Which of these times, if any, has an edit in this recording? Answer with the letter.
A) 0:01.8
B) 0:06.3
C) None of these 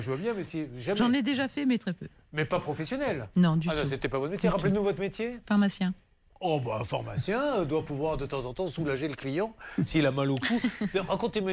A